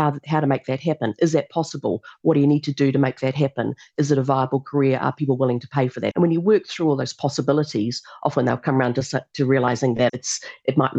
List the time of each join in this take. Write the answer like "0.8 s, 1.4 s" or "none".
6.1 s, 10.1 s